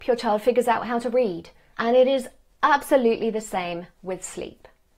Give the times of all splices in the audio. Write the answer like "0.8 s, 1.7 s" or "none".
1.7 s